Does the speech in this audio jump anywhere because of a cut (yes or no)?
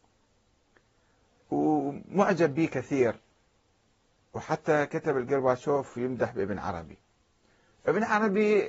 no